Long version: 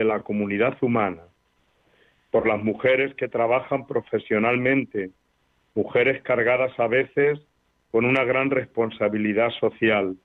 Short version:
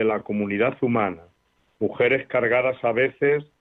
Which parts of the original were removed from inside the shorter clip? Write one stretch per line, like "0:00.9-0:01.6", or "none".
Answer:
0:01.7-0:05.7